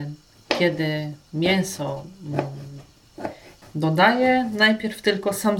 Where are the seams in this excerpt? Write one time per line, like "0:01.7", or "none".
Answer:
0:03.6